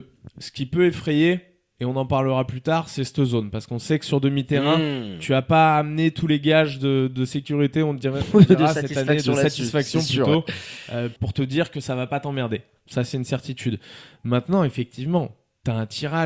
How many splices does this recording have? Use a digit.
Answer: 0